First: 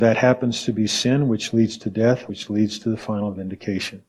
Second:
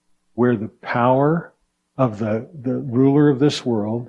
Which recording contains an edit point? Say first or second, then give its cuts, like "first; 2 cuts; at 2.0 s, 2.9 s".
first; 1 cut; at 2.3 s